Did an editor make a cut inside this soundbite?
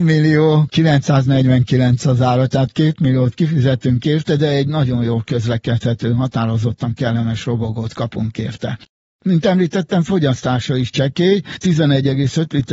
no; 0 cuts

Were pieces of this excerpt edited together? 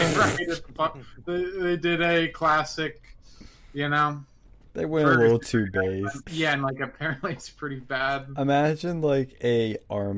yes; 1 cut; at 6.2 s

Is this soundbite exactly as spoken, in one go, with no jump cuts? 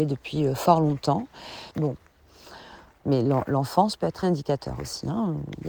no; 3 cuts; at 1.7 s, 3.0 s, 4.2 s

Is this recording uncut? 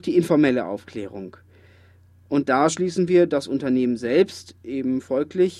yes; 0 cuts

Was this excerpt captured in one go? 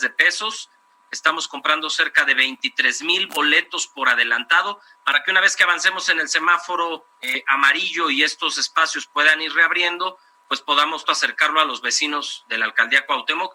no; 2 cuts; at 7.1 s, 11.0 s

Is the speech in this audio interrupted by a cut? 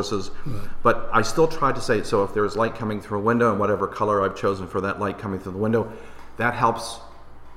no; 0 cuts

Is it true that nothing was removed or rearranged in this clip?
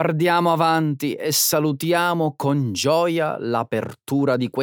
yes; 0 cuts

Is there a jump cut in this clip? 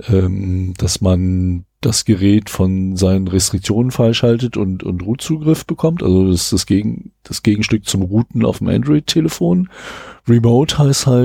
no; 0 cuts

